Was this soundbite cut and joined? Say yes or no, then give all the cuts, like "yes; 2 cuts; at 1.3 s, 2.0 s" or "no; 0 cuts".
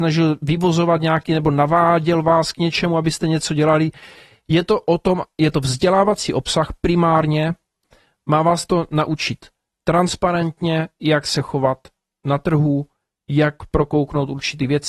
no; 0 cuts